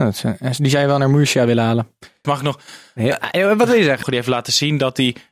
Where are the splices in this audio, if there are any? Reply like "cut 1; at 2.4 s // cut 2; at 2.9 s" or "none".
cut 1; at 2.2 s // cut 2; at 4.0 s